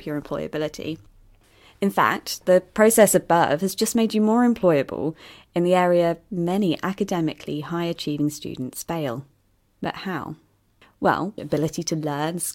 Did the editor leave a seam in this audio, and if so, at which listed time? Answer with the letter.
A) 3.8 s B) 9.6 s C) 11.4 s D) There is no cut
C